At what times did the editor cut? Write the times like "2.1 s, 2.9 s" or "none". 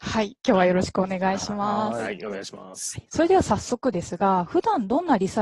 none